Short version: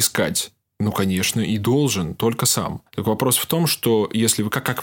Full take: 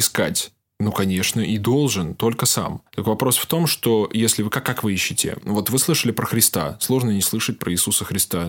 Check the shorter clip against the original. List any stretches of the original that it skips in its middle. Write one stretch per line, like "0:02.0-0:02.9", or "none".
none